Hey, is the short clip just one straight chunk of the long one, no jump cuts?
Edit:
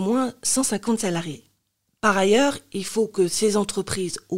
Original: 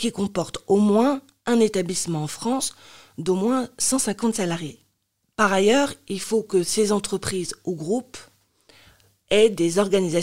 yes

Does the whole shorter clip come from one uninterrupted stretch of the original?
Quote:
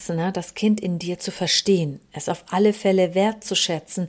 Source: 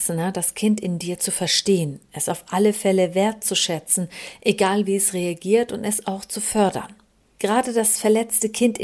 yes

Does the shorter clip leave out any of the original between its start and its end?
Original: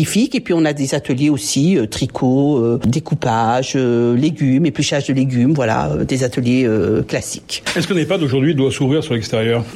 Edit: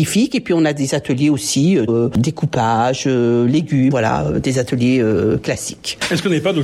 yes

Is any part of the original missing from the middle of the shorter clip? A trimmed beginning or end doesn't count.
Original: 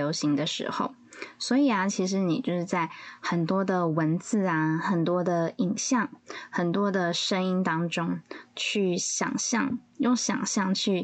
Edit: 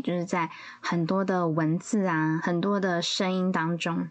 yes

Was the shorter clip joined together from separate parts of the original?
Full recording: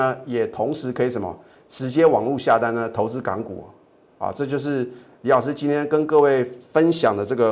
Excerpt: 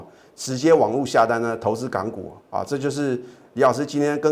yes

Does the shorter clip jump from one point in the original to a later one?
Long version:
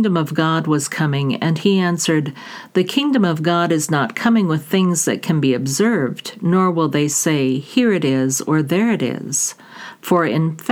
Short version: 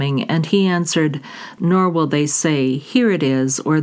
yes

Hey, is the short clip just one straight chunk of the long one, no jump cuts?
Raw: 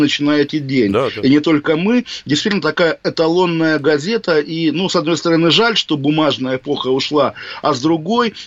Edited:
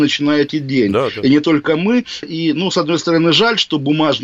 no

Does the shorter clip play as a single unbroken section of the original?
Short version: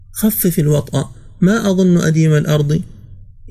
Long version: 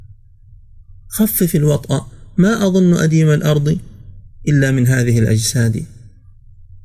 yes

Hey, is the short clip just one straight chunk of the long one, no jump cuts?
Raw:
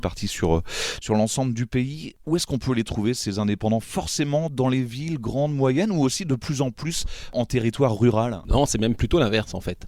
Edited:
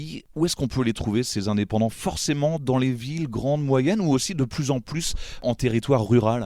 yes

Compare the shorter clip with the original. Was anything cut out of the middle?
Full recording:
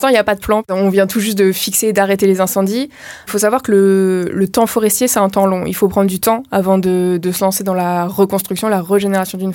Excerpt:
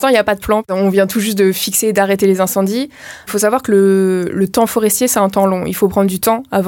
no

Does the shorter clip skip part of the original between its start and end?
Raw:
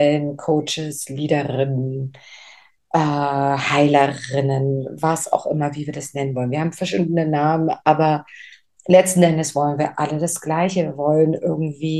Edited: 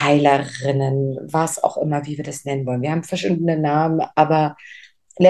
no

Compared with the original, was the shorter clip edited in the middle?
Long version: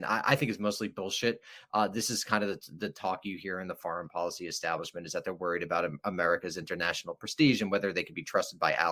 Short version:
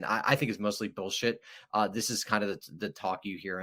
no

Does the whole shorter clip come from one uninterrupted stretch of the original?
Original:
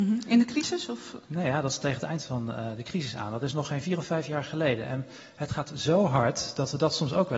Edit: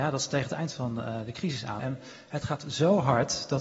no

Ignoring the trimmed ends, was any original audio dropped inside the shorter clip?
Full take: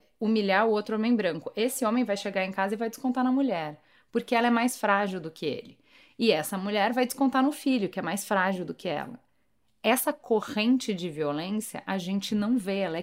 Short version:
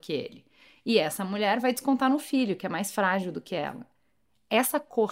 no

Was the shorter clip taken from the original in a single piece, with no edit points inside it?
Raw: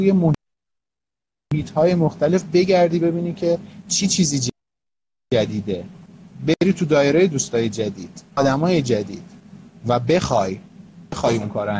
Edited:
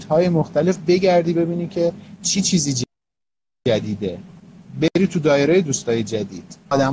yes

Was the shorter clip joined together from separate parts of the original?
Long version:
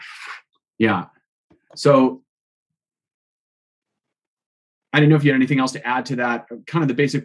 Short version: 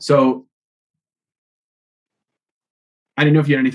no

